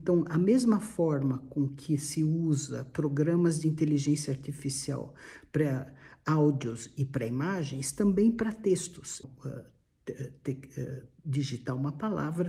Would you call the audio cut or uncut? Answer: cut